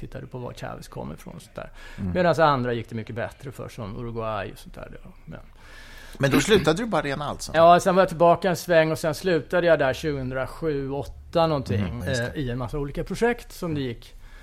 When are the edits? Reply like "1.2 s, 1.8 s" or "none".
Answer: 7.5 s, 12.0 s